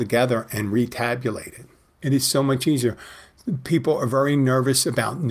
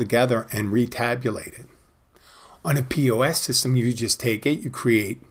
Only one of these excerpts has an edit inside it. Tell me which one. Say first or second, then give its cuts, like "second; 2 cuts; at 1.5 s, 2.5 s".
first; 1 cut; at 2.0 s